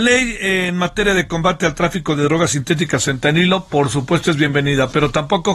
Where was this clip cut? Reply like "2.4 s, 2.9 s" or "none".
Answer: none